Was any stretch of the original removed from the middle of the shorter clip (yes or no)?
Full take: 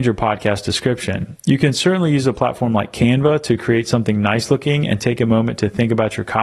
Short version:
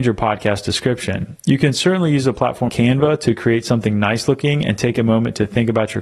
yes